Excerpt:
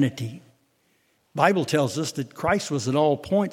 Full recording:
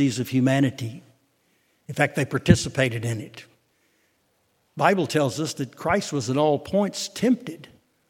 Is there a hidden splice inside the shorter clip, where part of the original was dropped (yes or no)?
yes